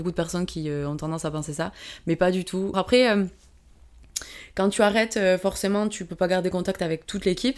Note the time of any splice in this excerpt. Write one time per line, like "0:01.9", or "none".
0:02.7